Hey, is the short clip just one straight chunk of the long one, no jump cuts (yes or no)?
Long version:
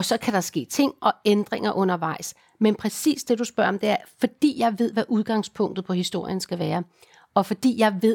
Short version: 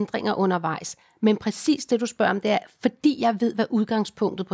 yes